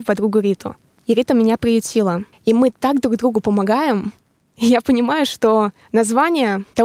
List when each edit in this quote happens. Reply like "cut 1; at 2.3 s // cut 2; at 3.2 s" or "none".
cut 1; at 2.3 s